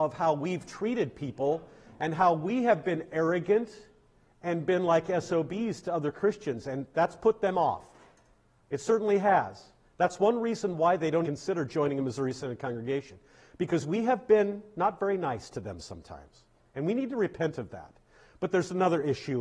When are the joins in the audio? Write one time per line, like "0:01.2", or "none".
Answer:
0:11.2